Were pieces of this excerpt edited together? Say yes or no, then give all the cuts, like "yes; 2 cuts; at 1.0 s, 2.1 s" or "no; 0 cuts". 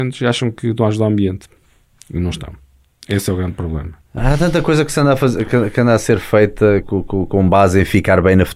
yes; 1 cut; at 6.8 s